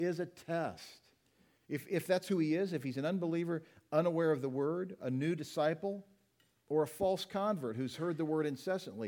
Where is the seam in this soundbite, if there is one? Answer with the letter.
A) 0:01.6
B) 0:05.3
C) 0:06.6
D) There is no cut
A